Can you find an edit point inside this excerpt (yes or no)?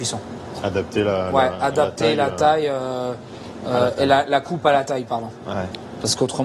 no